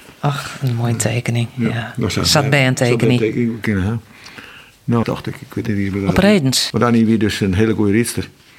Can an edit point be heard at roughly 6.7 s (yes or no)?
yes